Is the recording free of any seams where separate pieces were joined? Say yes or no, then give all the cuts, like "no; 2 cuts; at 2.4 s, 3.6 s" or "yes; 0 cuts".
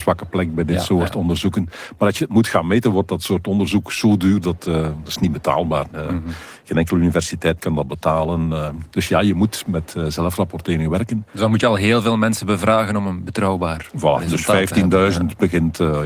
yes; 0 cuts